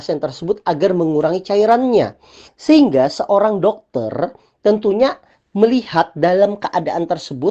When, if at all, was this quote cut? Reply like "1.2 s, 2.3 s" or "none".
2.5 s